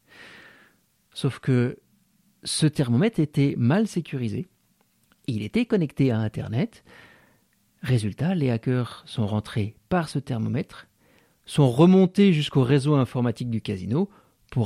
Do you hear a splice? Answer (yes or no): no